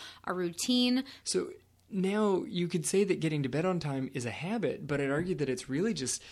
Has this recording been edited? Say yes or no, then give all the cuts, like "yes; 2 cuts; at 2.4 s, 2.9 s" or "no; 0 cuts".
yes; 1 cut; at 1.2 s